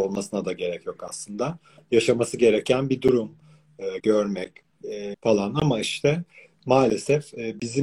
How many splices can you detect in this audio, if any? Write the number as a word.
two